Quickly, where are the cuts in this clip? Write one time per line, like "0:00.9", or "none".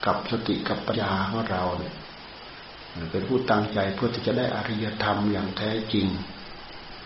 0:00.9